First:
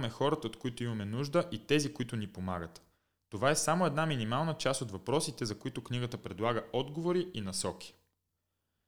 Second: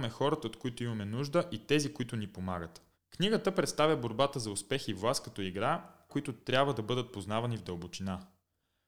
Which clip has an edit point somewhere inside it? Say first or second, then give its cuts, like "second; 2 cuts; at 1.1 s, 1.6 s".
second; 2 cuts; at 2.9 s, 6.1 s